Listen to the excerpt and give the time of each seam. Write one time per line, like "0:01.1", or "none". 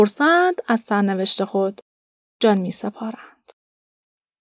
none